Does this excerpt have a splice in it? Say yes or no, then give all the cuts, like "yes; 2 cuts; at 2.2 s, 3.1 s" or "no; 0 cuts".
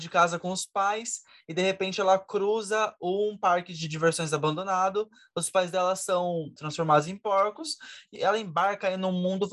yes; 2 cuts; at 6.6 s, 8.2 s